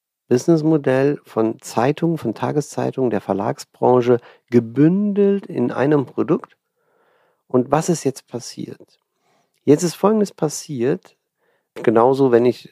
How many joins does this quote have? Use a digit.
1